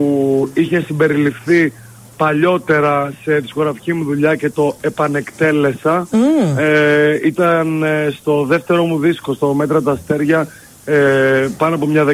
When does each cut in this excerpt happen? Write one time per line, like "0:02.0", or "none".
none